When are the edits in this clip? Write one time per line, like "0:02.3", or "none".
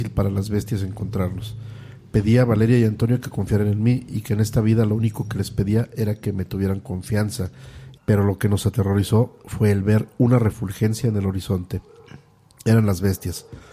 0:08.0